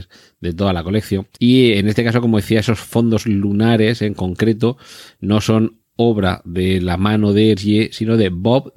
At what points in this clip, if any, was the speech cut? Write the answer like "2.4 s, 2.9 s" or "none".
1.3 s